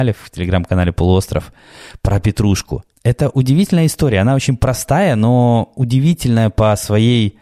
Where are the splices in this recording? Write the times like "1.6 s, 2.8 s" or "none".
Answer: 2.9 s

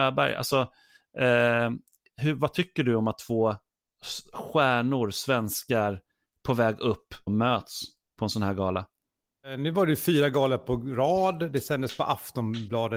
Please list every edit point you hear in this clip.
7.3 s

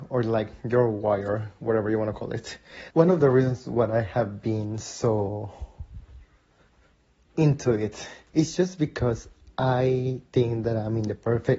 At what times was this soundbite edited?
2.9 s, 8.3 s

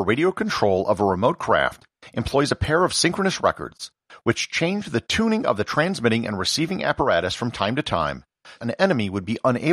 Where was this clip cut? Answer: 4.2 s, 8.6 s

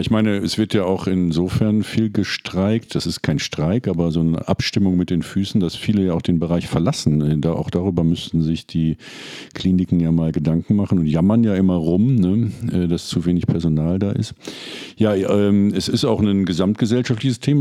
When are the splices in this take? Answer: none

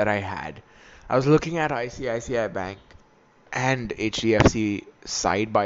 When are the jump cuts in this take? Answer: none

